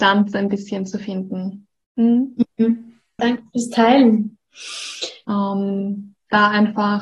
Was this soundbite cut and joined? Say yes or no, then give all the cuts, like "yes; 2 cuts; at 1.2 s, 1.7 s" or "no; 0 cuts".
yes; 2 cuts; at 3.2 s, 5.2 s